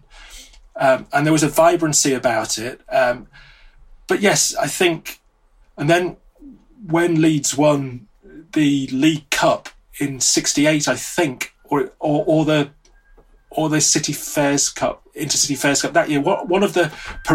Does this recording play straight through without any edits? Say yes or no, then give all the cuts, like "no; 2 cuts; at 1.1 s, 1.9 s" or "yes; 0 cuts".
no; 1 cut; at 5.6 s